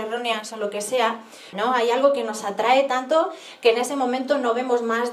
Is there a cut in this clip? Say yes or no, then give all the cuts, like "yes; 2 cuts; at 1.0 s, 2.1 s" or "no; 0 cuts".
yes; 1 cut; at 1.5 s